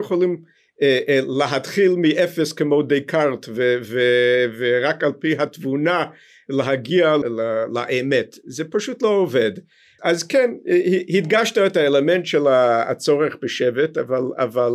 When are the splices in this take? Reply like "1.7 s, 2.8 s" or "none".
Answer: 7.2 s, 10.0 s